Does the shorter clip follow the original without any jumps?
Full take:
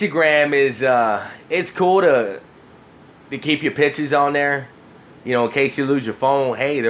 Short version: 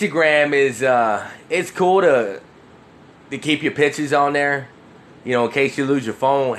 yes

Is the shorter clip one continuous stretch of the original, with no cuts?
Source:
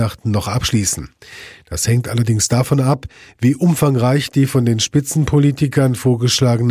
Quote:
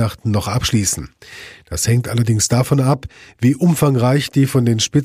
yes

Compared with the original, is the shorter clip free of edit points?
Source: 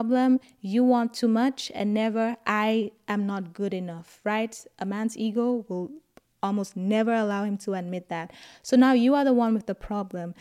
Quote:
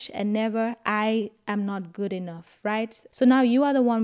no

